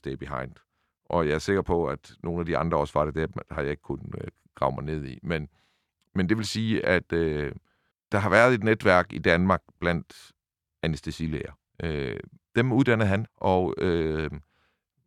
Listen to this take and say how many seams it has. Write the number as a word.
two